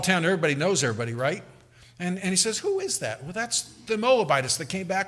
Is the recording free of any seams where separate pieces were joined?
yes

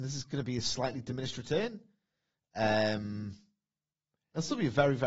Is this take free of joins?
yes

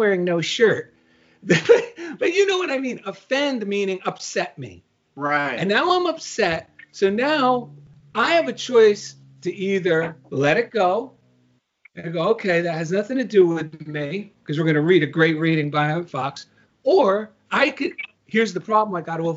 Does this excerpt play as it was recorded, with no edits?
yes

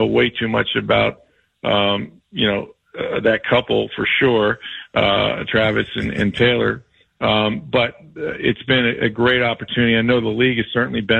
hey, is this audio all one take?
yes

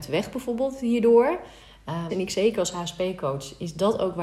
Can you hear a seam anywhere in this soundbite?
yes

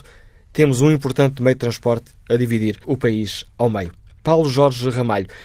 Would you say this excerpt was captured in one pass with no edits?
no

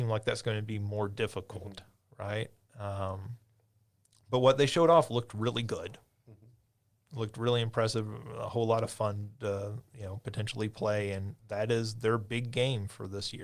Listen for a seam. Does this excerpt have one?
no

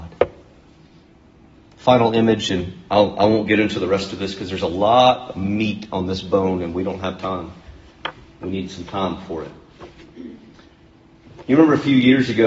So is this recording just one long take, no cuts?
yes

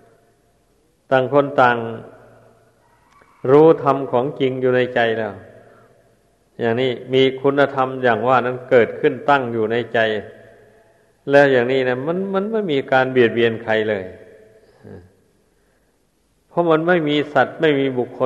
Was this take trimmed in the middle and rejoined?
no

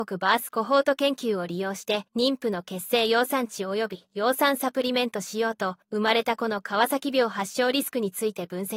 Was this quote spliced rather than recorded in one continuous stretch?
yes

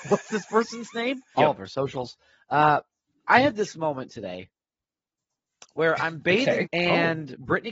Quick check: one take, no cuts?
no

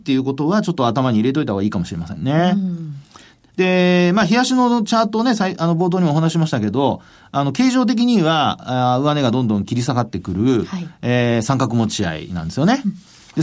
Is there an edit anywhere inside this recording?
no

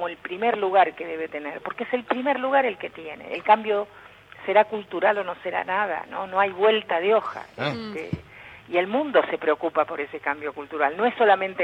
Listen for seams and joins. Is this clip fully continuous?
yes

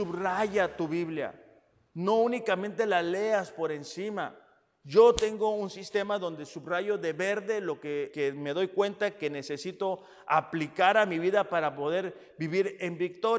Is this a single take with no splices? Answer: no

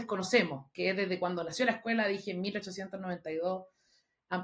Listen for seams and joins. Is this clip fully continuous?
yes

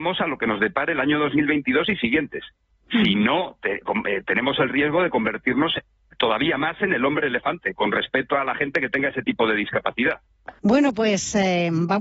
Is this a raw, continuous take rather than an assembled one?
no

